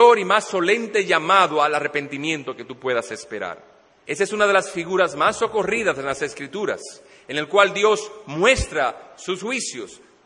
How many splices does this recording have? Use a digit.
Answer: 1